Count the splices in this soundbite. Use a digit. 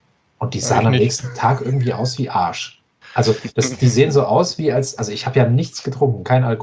0